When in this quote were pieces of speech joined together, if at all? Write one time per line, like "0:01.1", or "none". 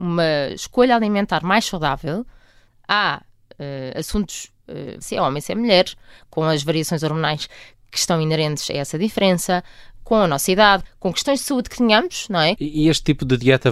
0:05.0
0:10.8
0:12.6